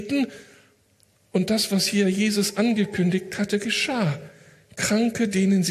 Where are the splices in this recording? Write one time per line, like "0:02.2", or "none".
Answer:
none